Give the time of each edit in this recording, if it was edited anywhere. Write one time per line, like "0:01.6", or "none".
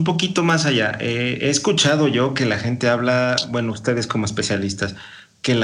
none